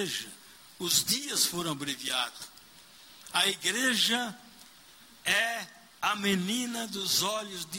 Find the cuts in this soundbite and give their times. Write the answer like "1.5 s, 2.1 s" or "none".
none